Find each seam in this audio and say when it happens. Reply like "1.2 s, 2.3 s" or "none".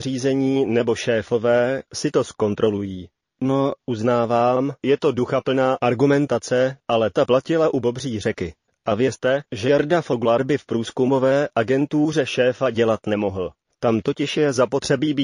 none